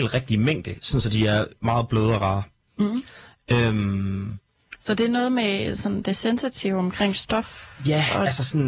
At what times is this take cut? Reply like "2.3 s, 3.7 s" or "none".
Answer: none